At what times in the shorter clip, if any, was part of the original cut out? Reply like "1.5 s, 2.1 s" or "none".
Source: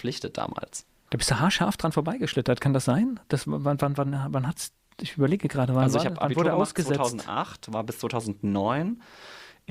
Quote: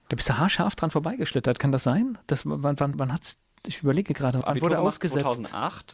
2.9 s, 4.4 s

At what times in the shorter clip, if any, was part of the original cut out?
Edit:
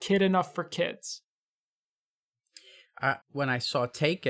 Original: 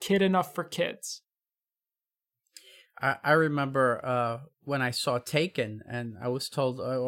3.2 s

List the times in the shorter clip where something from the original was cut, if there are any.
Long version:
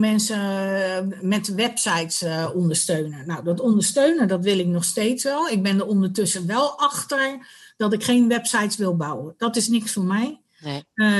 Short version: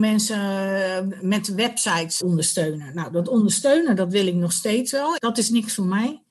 2.2 s, 5.2 s

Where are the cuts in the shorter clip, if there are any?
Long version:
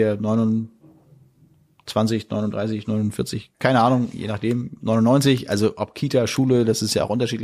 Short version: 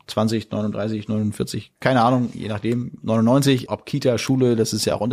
3.7 s

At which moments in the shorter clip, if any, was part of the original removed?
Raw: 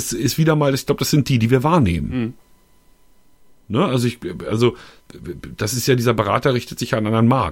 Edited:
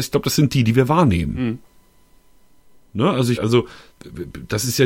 3.3 s

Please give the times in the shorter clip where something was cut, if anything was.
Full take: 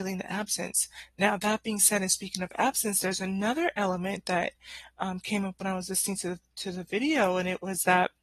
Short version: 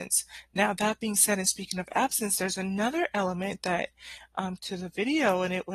4.6 s

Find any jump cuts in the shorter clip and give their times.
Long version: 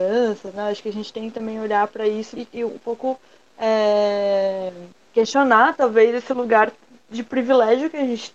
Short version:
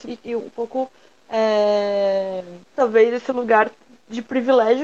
2.7 s

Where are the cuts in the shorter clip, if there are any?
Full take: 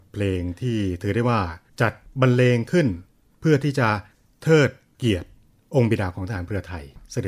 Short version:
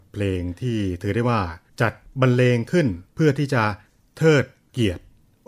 3.1 s

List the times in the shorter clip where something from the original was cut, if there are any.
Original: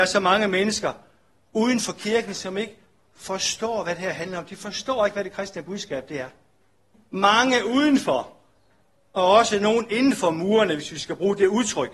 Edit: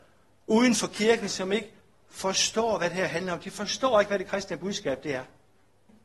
none

